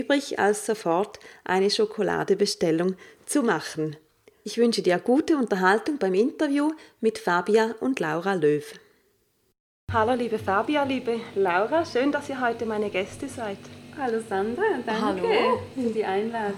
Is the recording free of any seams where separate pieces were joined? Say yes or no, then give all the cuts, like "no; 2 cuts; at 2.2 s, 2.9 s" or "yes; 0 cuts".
yes; 0 cuts